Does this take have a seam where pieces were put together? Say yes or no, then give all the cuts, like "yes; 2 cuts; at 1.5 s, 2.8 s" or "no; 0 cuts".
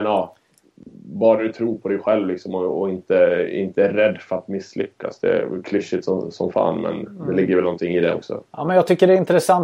no; 0 cuts